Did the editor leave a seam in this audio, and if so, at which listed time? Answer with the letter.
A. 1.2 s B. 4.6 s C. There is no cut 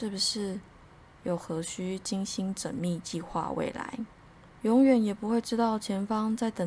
A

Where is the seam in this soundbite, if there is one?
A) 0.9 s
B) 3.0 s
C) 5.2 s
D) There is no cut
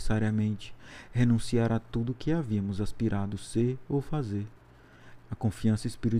C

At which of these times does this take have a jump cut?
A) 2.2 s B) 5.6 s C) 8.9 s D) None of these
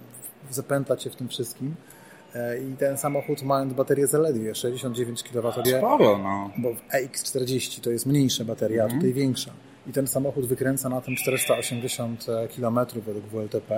B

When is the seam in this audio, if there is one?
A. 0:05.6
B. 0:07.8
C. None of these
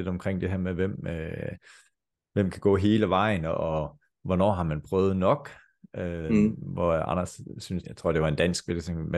B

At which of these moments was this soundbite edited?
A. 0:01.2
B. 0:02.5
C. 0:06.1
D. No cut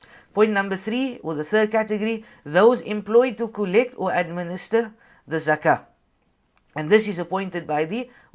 D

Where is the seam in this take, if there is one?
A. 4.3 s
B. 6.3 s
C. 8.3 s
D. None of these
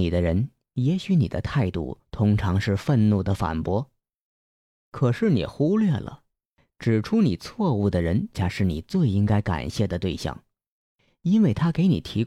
C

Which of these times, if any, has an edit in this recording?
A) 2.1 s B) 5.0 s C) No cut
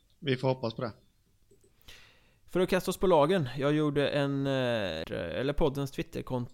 B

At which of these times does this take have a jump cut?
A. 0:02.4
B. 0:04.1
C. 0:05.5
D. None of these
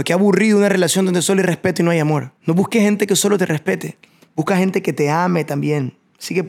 A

